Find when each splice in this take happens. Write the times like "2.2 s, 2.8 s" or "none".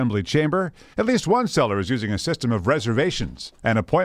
0.9 s